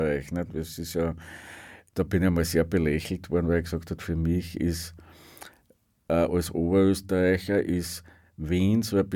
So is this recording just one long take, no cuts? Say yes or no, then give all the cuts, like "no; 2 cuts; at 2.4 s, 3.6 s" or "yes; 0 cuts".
yes; 0 cuts